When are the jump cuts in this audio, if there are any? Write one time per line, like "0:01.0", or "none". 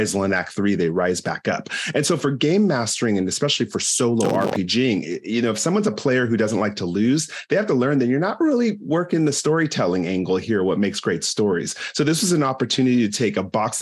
none